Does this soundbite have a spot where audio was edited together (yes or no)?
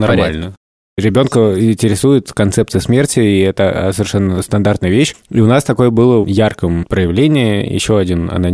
yes